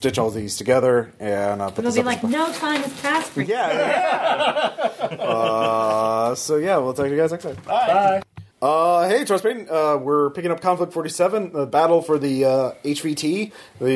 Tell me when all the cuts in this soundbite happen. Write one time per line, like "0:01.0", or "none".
0:08.5